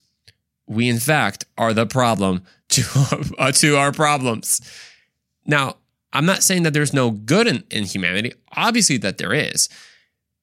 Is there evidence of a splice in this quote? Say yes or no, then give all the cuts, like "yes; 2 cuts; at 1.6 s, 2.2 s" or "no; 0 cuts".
no; 0 cuts